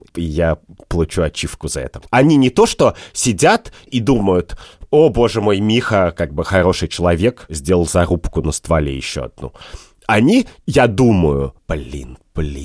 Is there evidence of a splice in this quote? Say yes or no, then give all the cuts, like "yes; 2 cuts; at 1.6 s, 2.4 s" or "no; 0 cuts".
yes; 2 cuts; at 2.1 s, 11.6 s